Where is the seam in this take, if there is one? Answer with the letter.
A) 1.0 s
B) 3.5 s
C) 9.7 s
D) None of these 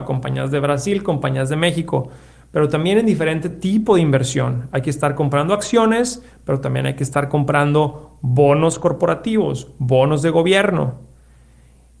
D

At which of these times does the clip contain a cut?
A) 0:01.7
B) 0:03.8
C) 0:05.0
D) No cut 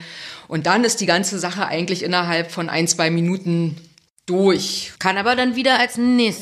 C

